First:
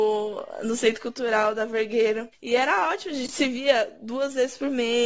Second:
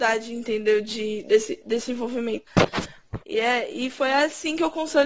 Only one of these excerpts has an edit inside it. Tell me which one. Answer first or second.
second